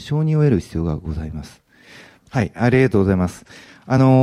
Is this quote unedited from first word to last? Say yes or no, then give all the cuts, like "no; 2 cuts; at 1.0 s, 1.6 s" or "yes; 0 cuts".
no; 1 cut; at 2.2 s